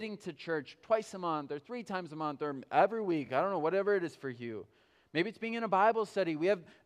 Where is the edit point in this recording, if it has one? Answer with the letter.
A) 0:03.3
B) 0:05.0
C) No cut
C